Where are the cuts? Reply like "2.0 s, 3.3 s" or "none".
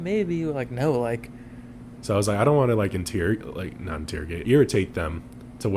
2.0 s, 4.4 s

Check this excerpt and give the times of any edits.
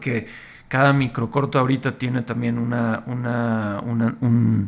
none

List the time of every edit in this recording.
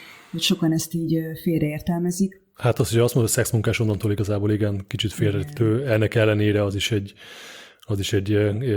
none

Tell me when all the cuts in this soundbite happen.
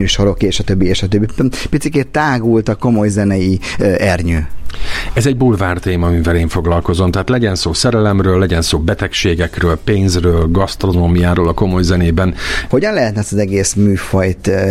12.7 s

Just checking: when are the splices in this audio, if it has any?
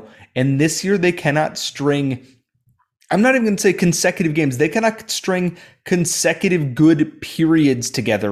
none

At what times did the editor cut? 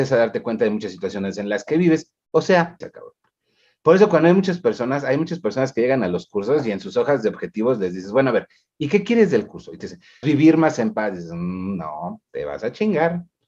2.8 s, 10.2 s

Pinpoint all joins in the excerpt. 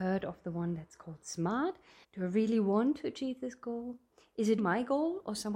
2.0 s, 4.6 s

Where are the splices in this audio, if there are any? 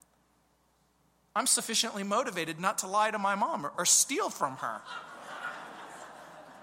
3.7 s

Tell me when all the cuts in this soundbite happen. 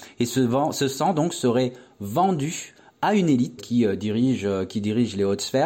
3.6 s

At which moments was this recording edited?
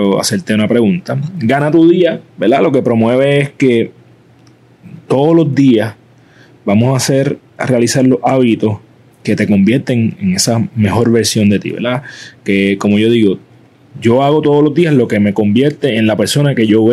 none

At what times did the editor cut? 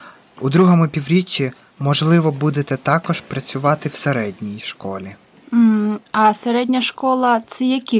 none

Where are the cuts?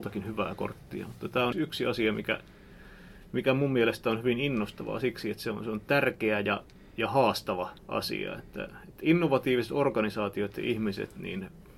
1.5 s, 7.8 s

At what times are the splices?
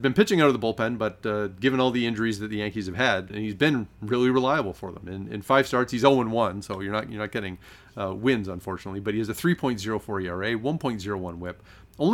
3.3 s

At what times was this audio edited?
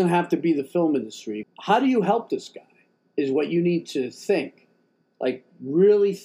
1.4 s

